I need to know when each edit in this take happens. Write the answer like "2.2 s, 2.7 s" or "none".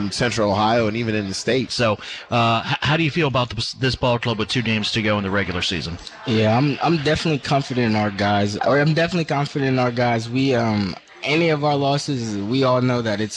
1.7 s, 8.6 s